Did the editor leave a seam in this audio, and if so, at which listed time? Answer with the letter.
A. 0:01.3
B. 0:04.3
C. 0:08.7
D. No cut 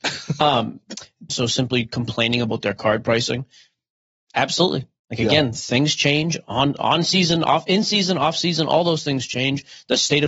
A